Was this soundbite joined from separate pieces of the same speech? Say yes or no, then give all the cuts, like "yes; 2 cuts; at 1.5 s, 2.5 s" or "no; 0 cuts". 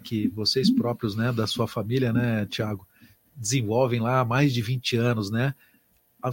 no; 0 cuts